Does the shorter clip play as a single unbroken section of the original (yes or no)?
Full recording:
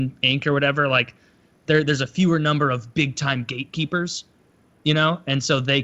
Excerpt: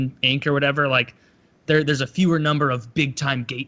yes